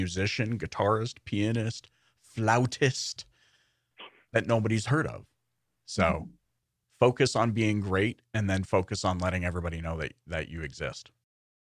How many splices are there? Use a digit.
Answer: 0